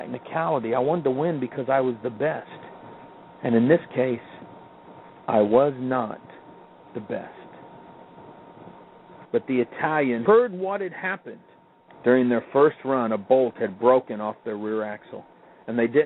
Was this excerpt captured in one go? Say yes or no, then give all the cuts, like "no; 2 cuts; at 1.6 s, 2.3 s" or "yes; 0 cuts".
no; 3 cuts; at 9.3 s, 10.3 s, 11.9 s